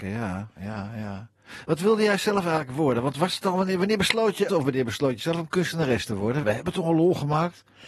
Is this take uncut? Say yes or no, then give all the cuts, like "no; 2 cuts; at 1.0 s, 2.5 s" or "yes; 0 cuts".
no; 2 cuts; at 4.5 s, 6.4 s